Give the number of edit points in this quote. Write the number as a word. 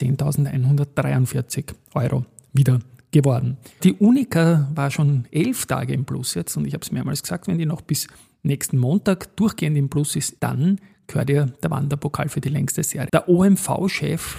three